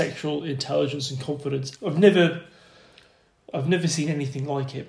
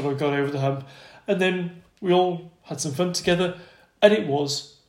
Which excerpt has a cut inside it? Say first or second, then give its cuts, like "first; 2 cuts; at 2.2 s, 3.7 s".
first; 1 cut; at 1.8 s